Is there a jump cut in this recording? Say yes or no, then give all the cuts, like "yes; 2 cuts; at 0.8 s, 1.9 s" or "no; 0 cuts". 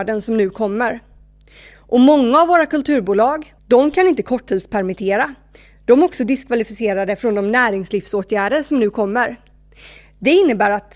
yes; 1 cut; at 3.6 s